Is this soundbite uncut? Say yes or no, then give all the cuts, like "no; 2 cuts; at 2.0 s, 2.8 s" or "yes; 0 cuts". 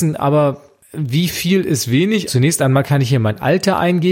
no; 1 cut; at 2.3 s